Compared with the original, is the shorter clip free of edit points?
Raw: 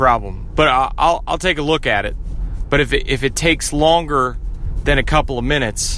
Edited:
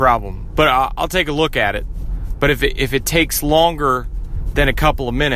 no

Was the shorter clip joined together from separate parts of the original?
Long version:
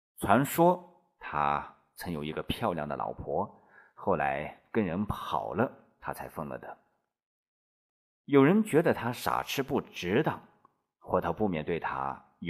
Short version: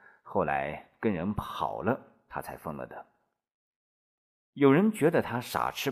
no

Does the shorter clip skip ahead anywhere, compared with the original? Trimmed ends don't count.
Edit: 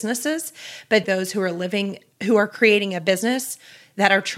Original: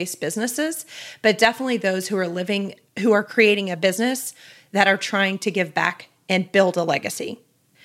yes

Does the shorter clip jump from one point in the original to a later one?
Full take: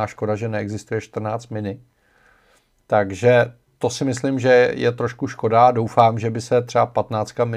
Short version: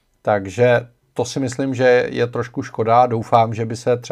no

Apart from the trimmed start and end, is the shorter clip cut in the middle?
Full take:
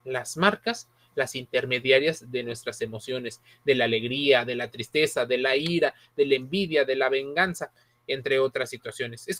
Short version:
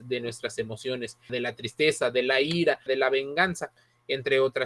yes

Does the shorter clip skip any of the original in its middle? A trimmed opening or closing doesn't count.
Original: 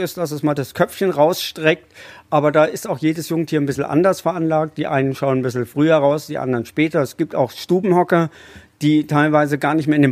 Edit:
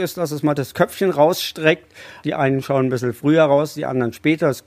yes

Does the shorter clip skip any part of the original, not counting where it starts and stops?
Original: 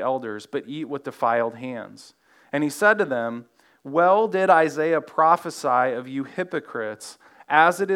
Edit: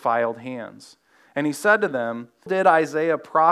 yes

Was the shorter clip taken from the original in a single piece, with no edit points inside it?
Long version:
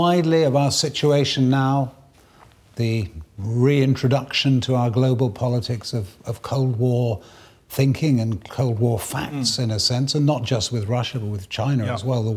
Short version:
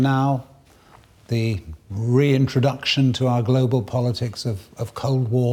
yes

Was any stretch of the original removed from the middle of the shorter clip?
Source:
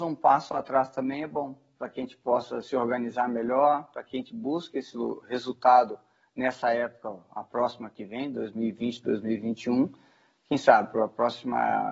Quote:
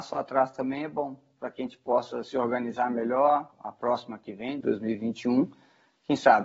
yes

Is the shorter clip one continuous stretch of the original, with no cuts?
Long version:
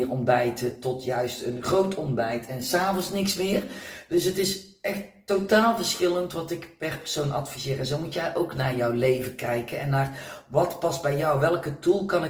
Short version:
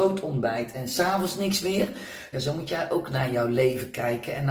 no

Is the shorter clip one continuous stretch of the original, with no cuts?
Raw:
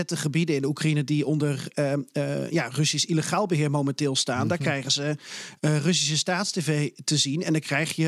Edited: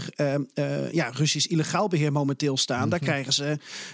yes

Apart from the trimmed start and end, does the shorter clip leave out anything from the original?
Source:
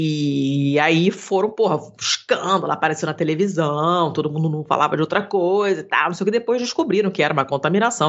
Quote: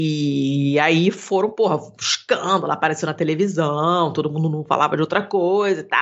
no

